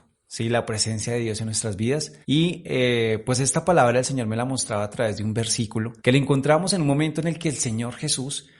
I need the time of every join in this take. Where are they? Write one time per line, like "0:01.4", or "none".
0:02.2
0:06.0